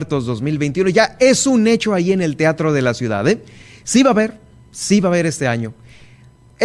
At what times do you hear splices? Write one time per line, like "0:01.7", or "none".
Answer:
none